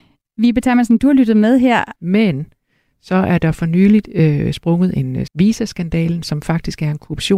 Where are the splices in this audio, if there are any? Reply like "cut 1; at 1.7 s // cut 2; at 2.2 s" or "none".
cut 1; at 2.0 s // cut 2; at 5.3 s